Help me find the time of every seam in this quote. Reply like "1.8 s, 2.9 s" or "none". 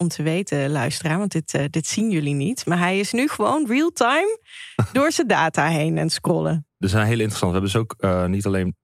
none